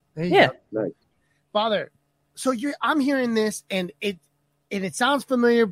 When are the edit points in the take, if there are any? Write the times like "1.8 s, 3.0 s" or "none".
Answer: none